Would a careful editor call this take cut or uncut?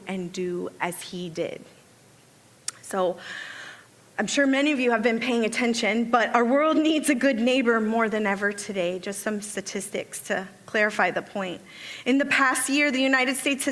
uncut